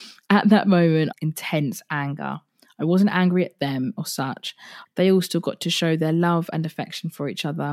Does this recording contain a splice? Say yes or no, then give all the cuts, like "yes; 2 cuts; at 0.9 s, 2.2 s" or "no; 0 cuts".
yes; 2 cuts; at 1.1 s, 4.9 s